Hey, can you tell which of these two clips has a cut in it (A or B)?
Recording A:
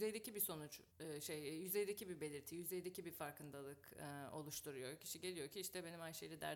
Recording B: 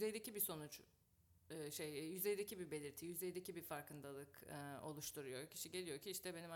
A